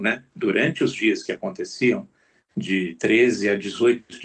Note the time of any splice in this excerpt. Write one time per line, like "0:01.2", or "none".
none

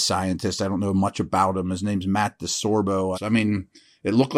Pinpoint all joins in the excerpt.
0:03.1

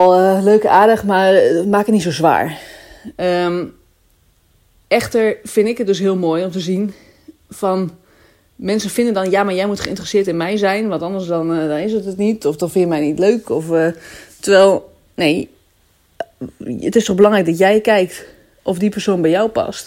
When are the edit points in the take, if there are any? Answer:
0:03.1

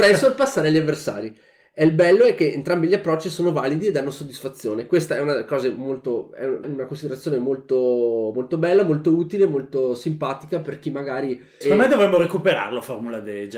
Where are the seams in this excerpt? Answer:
0:06.6
0:11.6

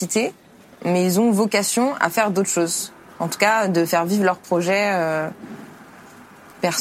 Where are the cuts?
none

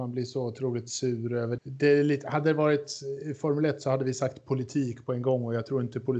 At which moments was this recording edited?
0:01.6

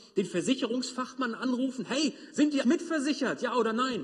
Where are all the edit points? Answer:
0:02.6

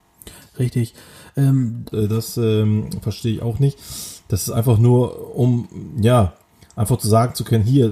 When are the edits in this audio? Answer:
0:01.9

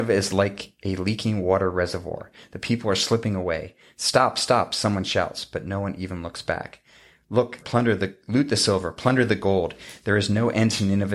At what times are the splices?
0:07.6

